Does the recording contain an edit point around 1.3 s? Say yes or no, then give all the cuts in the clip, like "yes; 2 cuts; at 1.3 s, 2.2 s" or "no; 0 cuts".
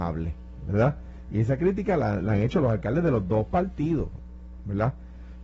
no; 0 cuts